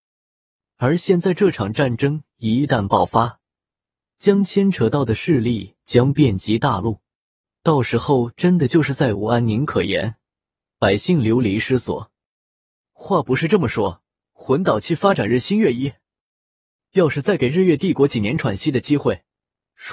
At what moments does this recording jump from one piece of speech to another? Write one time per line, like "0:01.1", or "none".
none